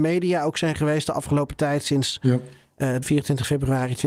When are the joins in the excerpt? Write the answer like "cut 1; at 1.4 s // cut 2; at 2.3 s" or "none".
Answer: cut 1; at 3.0 s